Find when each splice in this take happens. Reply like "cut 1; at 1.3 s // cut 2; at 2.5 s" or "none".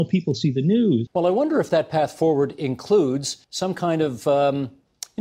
cut 1; at 1.1 s // cut 2; at 3.4 s